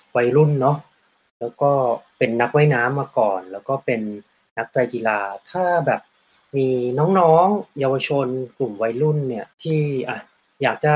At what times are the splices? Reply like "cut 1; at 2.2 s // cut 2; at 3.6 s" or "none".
cut 1; at 9.5 s